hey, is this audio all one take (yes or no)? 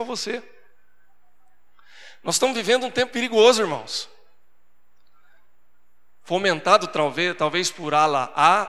no